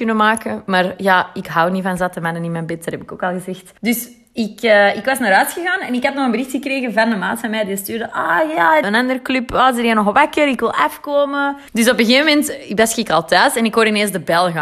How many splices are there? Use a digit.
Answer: 3